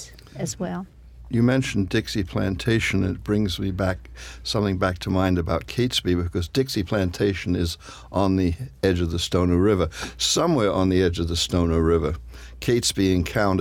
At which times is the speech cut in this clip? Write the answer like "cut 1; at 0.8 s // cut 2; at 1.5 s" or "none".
none

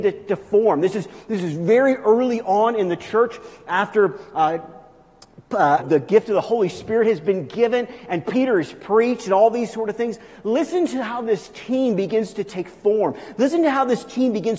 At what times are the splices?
cut 1; at 5.8 s

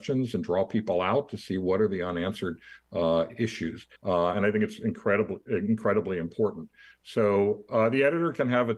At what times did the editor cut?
cut 1; at 4.0 s

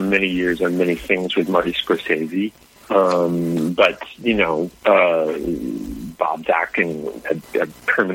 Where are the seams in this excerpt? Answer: none

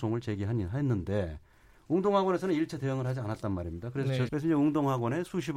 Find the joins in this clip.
cut 1; at 4.3 s

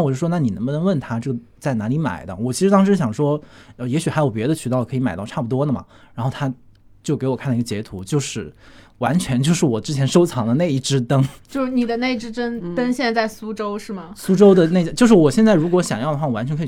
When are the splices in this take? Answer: none

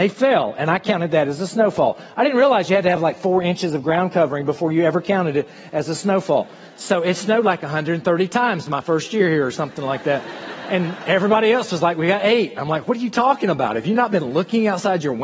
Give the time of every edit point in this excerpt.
none

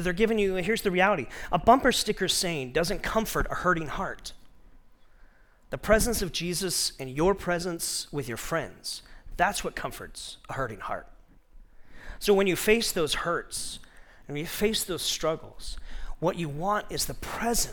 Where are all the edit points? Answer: none

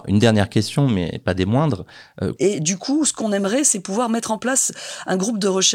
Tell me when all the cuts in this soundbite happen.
cut 1; at 2.4 s

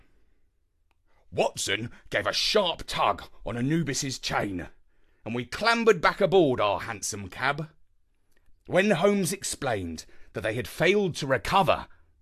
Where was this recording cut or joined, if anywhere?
cut 1; at 8.5 s

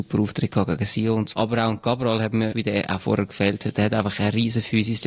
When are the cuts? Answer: cut 1; at 1.3 s // cut 2; at 2.5 s

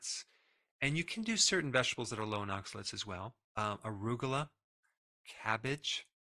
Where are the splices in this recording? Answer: cut 1; at 3.4 s

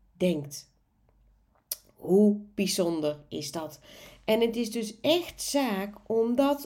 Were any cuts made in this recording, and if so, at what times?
none

